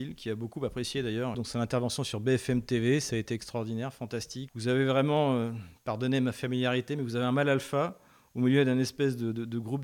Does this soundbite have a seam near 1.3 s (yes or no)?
yes